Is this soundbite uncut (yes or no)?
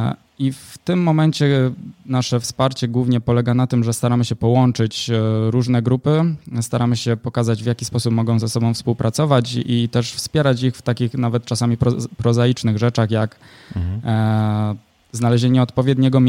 yes